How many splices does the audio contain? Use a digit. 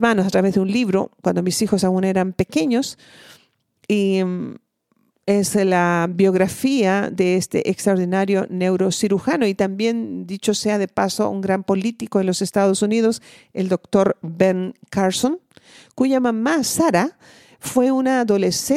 0